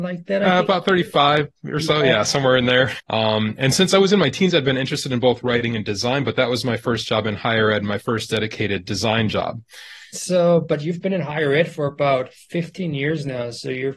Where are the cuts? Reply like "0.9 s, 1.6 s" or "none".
3.0 s, 10.1 s